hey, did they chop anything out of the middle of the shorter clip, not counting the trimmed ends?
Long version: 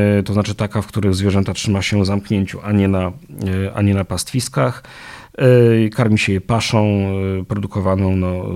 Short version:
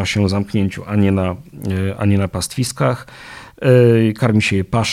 no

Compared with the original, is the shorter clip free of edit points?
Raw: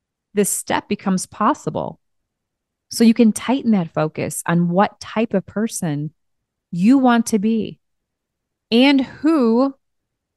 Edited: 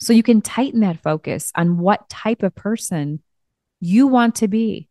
yes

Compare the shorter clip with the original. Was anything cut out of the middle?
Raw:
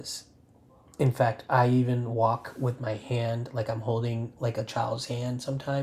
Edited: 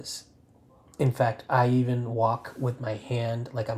no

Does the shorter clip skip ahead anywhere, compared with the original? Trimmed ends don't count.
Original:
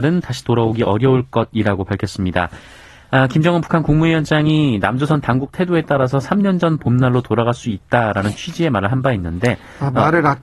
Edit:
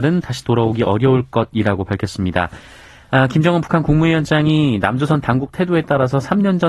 no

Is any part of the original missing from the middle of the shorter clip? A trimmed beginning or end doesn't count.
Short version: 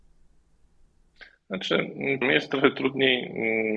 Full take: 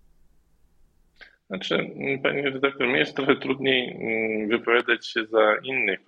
yes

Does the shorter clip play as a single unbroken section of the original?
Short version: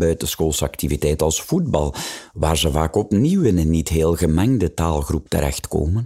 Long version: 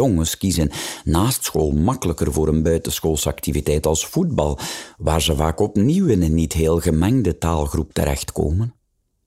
yes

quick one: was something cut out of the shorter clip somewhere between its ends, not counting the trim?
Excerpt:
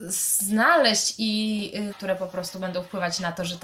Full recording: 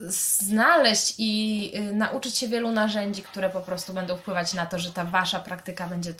yes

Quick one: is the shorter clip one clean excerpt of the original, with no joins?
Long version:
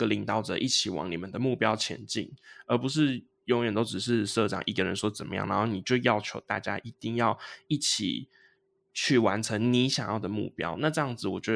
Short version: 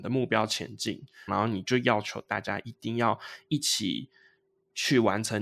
no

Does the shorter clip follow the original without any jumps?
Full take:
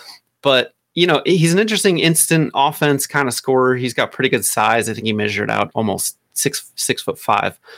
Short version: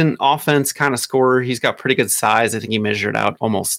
yes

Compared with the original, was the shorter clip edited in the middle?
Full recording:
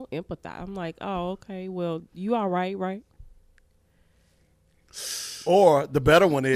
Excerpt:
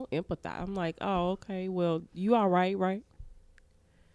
no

